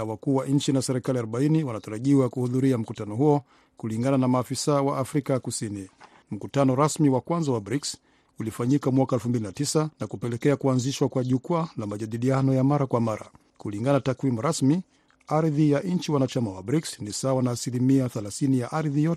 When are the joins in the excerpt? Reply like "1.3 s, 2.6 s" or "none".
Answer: 6.2 s, 9.9 s, 13.5 s